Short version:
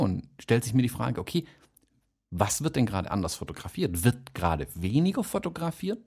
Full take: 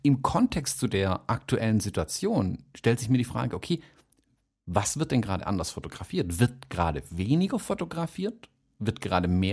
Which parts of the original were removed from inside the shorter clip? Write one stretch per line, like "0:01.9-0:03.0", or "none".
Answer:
none